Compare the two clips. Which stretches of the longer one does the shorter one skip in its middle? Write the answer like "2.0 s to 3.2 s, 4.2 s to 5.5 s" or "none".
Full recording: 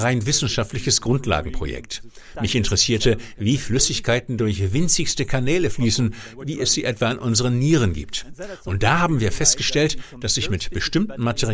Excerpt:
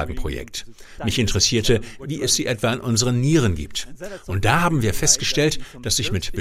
3.4 s to 6.4 s